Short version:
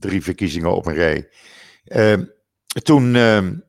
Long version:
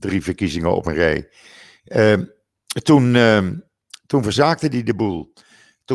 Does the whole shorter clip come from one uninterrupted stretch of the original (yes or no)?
yes